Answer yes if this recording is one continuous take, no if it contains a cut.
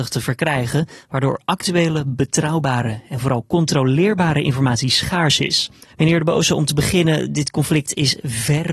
no